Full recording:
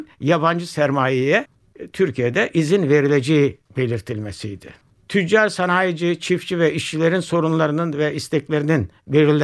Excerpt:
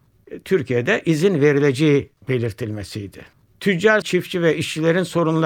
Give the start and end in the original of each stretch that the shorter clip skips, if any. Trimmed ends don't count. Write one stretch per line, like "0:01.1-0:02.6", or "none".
0:05.5-0:06.2